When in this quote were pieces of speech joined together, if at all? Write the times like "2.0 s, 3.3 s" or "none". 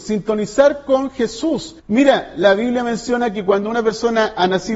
1.8 s